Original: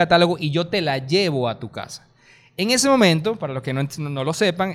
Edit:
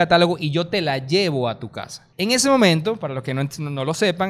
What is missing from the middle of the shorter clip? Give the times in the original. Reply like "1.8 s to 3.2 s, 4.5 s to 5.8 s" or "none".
2.1 s to 2.5 s